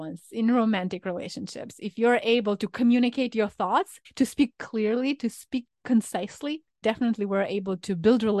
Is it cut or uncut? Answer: cut